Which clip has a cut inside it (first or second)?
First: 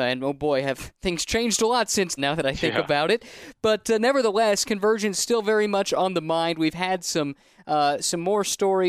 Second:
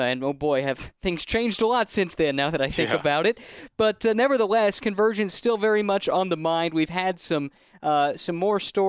first